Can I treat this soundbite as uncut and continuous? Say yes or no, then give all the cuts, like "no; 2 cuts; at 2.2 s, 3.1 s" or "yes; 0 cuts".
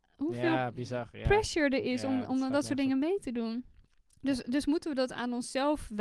yes; 0 cuts